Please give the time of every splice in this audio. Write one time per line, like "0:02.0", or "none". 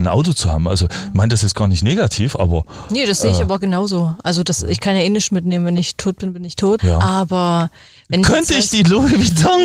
0:06.8